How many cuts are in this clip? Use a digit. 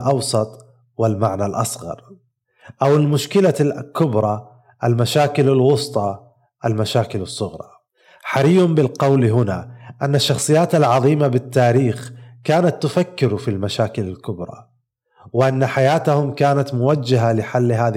0